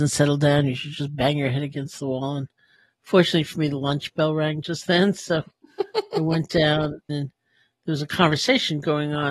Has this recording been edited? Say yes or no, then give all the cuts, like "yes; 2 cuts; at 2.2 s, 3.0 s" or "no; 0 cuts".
yes; 1 cut; at 7.1 s